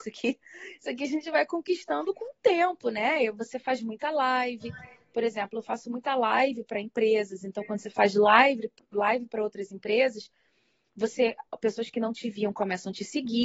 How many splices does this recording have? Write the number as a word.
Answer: zero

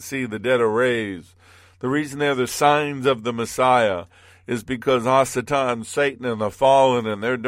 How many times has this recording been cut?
zero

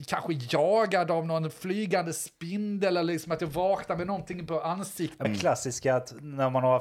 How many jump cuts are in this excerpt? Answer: one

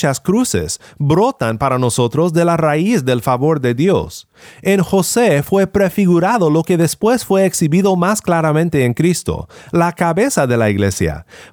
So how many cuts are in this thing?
zero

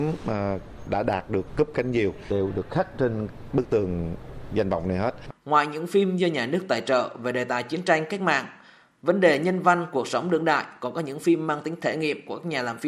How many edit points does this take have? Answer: one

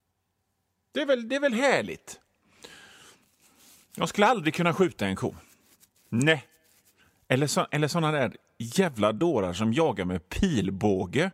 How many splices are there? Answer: zero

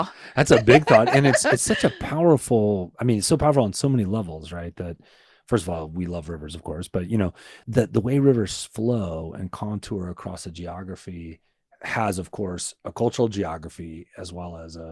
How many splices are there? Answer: one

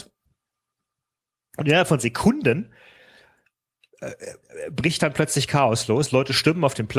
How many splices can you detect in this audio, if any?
zero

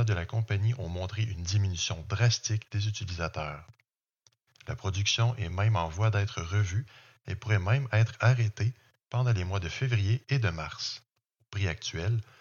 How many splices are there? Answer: one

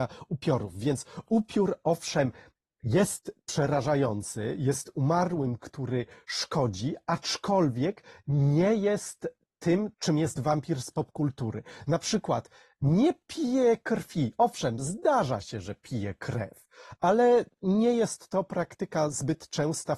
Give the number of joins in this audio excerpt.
one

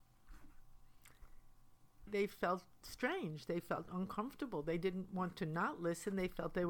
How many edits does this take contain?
one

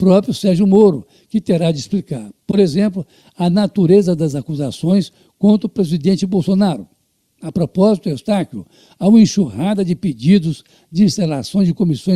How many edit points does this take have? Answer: zero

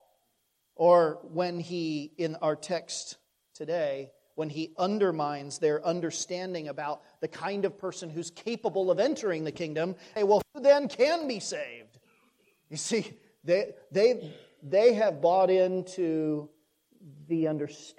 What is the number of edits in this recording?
one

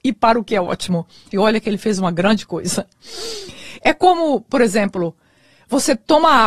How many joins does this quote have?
two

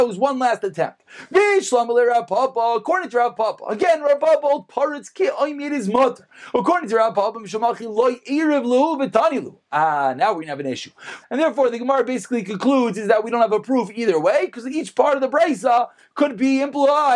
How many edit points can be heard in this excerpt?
one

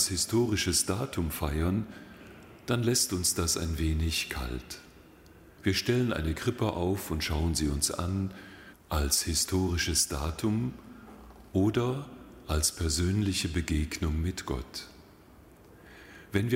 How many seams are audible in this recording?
two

